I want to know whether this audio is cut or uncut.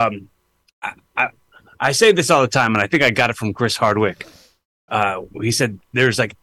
uncut